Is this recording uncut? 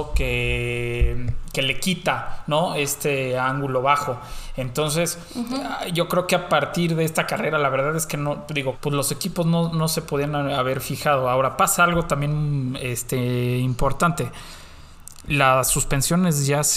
no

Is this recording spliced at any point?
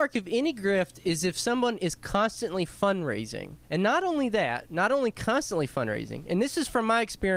yes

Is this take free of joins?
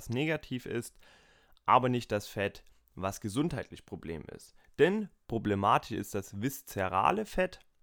yes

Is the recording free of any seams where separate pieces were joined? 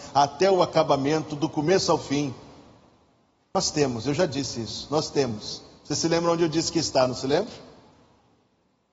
yes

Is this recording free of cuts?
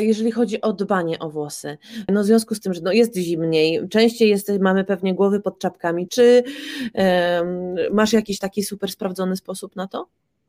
no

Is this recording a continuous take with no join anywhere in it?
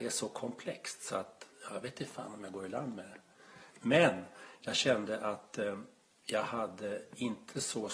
no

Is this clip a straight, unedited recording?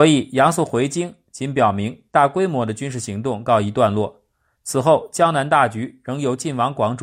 yes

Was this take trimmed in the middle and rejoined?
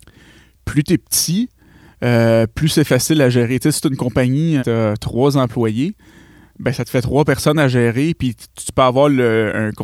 yes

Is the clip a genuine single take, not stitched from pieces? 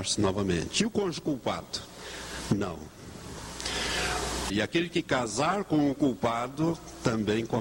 no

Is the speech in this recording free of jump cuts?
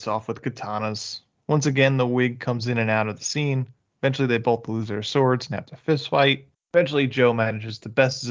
yes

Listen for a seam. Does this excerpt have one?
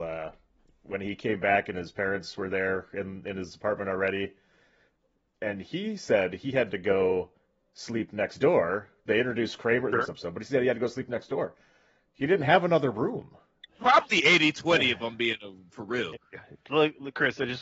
yes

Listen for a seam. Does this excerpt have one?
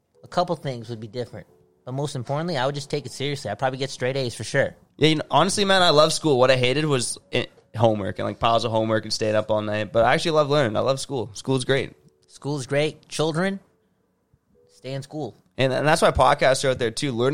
yes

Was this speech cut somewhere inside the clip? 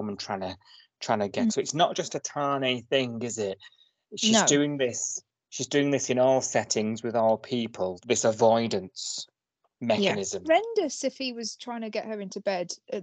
yes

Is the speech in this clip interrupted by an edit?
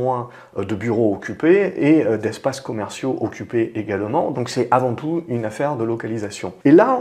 yes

